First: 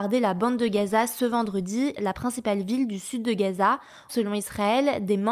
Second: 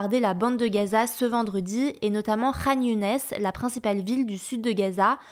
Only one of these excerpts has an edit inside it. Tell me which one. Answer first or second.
first